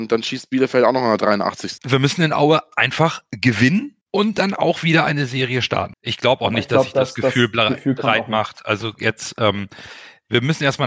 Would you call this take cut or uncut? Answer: cut